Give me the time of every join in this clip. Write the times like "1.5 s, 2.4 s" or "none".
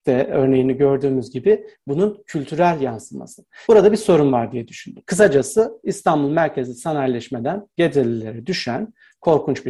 3.6 s, 5.0 s